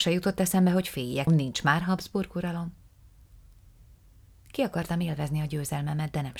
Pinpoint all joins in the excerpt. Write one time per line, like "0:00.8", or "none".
0:01.3